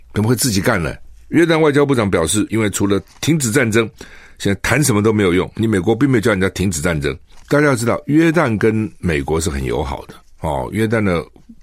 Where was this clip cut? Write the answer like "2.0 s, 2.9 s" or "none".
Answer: 2.5 s, 7.4 s

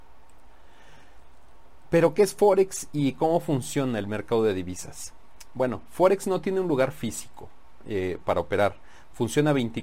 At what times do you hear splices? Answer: none

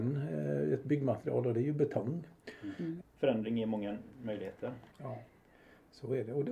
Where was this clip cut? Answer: 3.0 s, 4.9 s

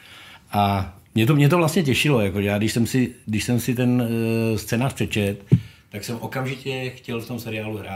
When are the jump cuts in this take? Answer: none

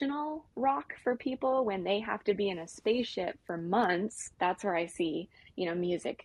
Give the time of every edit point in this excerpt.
4.3 s

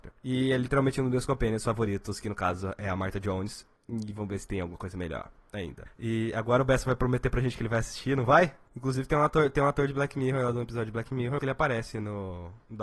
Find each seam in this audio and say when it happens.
5.9 s, 8.7 s, 11.4 s

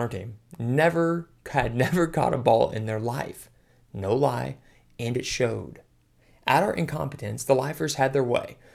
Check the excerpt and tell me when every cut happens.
none

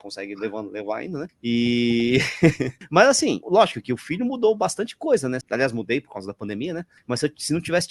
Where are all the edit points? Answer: 3.4 s, 5.4 s

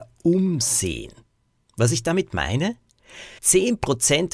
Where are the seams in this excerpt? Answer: 3.4 s

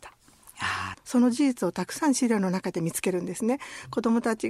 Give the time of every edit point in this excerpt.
0.9 s

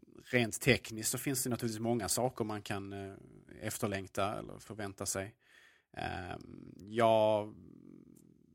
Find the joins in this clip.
none

